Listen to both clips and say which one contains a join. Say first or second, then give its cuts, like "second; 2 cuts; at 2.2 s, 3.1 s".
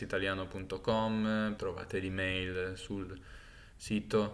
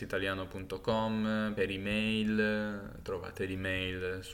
first; 1 cut; at 1.6 s